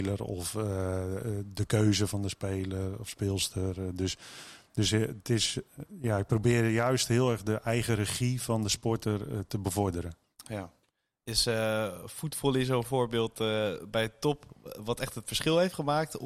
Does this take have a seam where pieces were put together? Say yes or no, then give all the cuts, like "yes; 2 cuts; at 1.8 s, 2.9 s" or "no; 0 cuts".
no; 0 cuts